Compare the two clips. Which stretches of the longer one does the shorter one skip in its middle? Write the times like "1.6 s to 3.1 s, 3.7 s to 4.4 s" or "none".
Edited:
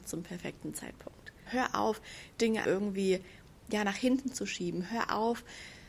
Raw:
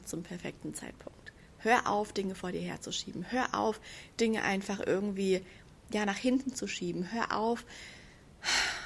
1.5 s to 3.2 s, 4.4 s to 4.8 s

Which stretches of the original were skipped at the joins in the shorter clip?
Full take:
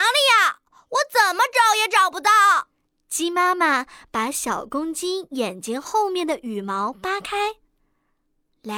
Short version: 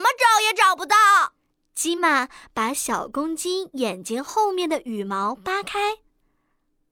3.3 s to 3.5 s

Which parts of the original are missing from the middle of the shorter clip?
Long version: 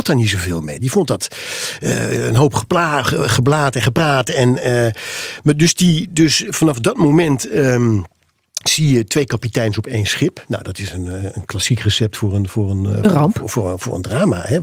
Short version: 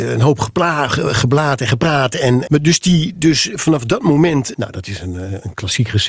4.6 s to 5.4 s, 7.5 s to 10.5 s

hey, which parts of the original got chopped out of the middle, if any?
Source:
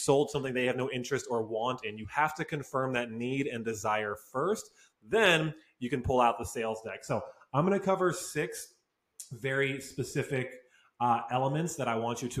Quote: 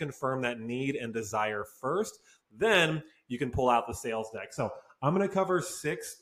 none

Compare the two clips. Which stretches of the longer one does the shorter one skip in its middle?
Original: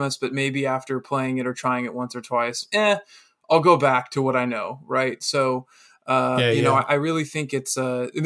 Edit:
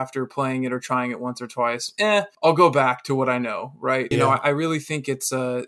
3.1 s to 3.4 s, 5.2 s to 6.6 s

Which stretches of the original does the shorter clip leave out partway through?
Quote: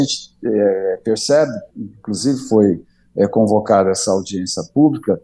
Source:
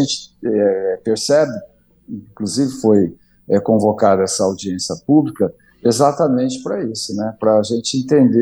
1.7 s to 2.0 s

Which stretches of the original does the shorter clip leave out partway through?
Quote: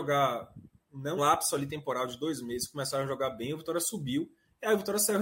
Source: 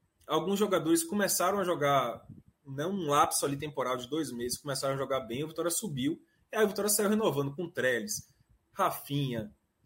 2.9 s to 3.1 s

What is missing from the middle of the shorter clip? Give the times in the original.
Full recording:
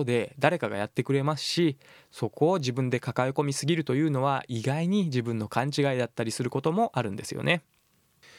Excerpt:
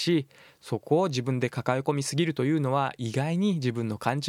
none

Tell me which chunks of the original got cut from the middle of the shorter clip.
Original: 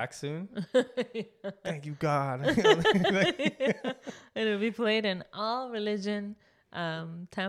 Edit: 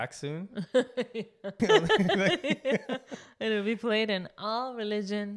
1.6 s to 2.6 s

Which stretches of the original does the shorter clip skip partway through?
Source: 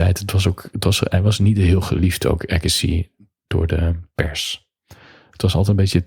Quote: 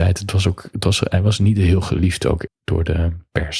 2.5 s to 3.3 s

